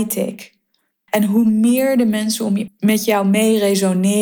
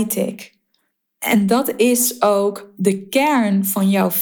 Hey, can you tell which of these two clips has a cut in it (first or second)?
first